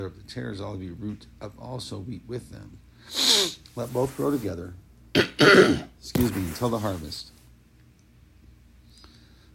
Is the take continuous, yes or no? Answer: yes